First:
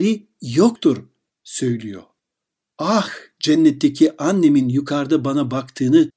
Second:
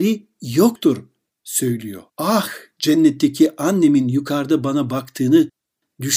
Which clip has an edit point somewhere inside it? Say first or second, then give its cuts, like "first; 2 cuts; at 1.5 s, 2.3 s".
second; 1 cut; at 2.1 s